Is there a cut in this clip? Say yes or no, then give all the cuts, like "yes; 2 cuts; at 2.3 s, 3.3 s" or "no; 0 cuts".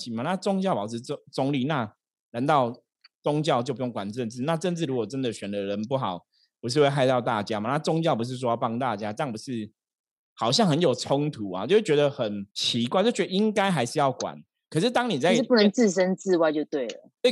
yes; 1 cut; at 12.5 s